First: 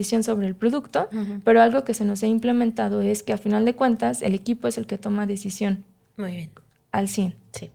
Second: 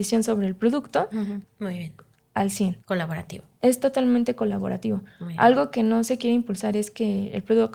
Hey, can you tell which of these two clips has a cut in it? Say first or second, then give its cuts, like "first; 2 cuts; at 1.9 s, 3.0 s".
second; 2 cuts; at 1.4 s, 2.8 s